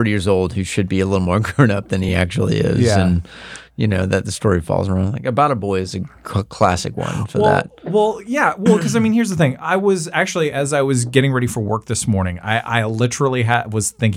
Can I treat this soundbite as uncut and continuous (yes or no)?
yes